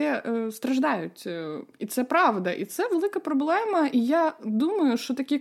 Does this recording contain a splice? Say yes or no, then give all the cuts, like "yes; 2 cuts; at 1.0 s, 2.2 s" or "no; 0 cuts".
no; 0 cuts